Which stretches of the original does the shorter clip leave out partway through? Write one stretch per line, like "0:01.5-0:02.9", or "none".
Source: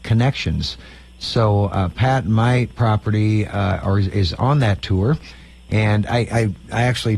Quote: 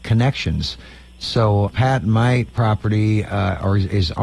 0:01.7-0:01.9